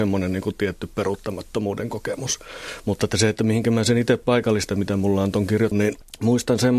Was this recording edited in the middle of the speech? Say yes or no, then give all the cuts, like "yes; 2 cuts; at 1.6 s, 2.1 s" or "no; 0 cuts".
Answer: yes; 2 cuts; at 4.7 s, 5.7 s